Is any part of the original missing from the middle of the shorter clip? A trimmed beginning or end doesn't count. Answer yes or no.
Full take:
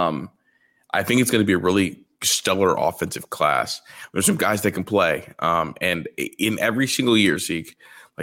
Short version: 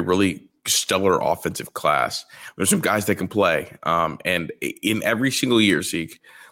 no